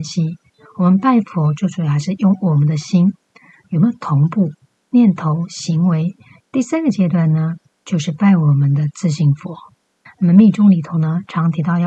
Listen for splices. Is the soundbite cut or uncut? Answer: cut